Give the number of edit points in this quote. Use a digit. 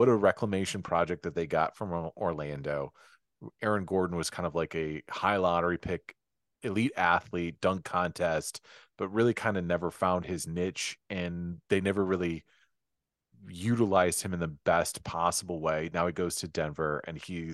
0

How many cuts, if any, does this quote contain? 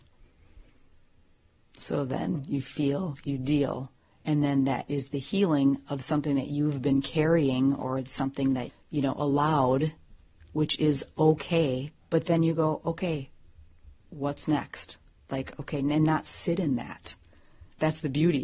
2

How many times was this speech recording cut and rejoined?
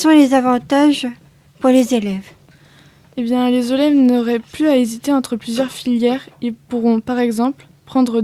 0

